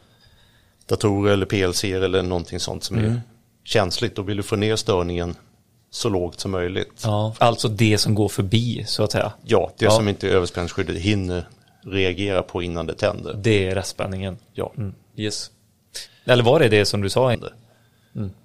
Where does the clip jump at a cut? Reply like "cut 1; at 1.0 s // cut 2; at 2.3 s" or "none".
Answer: cut 1; at 7.4 s // cut 2; at 16.1 s // cut 3; at 17.3 s